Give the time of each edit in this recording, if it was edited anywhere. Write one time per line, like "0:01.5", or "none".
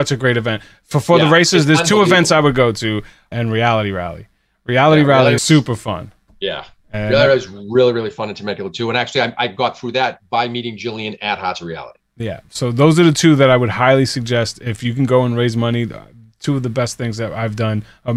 0:03.3
0:05.4